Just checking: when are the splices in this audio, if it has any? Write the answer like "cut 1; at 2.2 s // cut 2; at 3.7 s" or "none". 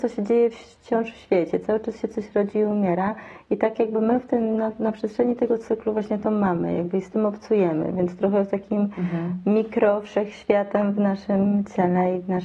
none